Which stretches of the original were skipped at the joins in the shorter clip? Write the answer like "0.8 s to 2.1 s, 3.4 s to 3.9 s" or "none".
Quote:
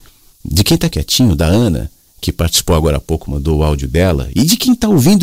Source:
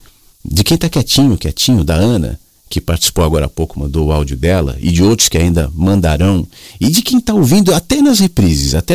0.9 s to 1.4 s, 4.8 s to 6.8 s